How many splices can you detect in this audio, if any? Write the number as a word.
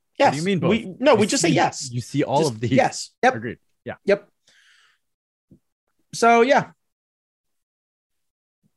one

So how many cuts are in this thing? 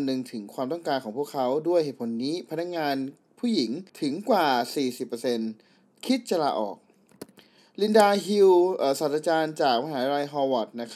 one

